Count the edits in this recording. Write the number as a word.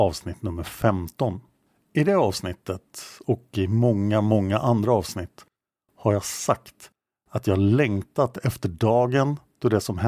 zero